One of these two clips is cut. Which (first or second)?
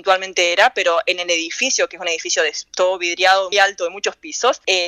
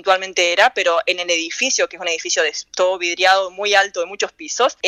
first